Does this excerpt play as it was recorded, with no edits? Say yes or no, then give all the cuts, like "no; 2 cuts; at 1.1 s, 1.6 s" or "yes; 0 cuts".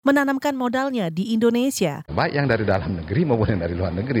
no; 1 cut; at 2.1 s